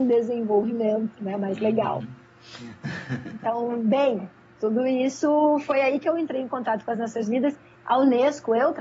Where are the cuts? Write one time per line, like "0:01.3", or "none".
0:07.8